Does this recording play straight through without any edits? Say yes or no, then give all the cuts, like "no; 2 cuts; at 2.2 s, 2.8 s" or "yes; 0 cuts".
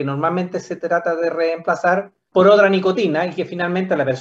no; 1 cut; at 2.3 s